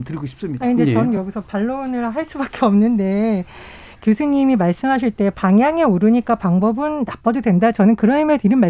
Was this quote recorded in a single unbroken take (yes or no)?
yes